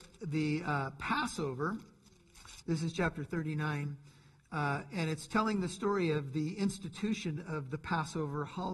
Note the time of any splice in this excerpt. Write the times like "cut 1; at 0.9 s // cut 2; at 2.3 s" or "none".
cut 1; at 2.6 s